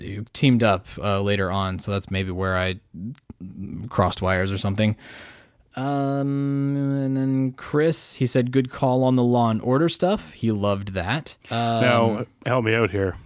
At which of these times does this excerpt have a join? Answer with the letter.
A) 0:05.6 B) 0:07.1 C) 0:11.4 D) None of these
C